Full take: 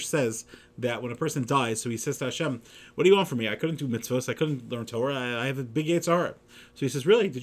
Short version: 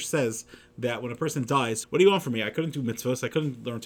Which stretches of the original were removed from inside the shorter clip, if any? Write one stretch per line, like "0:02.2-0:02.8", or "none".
0:01.8-0:02.9

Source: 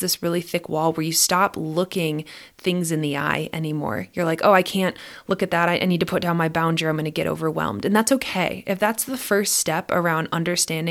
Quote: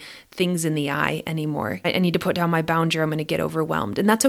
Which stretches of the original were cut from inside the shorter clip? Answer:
0:04.1-0:05.7

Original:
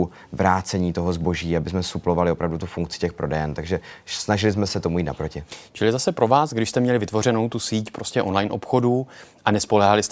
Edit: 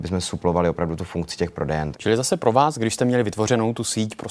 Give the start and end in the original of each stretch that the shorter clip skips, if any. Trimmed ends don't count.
0:03.5-0:05.7

